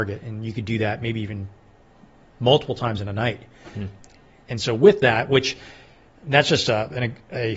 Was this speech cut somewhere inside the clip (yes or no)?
no